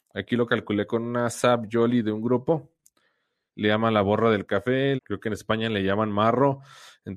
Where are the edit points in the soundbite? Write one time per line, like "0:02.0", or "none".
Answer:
0:03.5
0:05.0